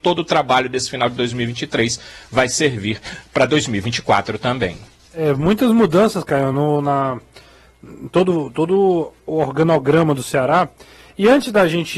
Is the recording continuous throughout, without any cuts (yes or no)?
yes